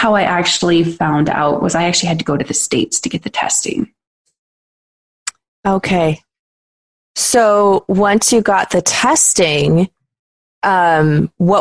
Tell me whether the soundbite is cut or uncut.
uncut